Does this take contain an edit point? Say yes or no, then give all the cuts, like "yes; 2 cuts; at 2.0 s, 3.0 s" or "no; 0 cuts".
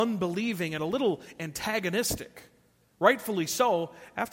no; 0 cuts